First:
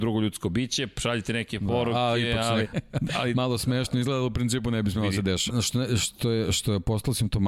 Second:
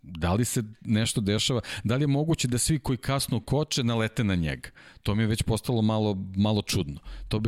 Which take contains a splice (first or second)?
first